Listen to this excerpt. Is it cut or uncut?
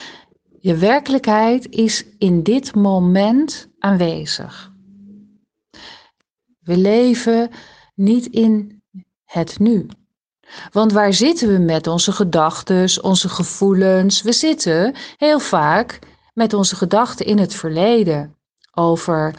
cut